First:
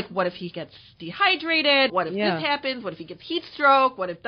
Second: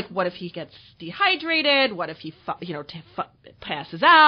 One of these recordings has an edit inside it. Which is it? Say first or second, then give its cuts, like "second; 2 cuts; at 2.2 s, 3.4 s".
first; 1 cut; at 1.9 s